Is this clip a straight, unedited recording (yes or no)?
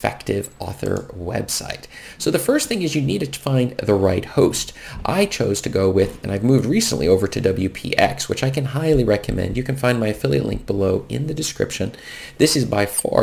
yes